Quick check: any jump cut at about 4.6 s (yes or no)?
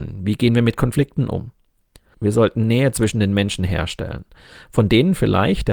no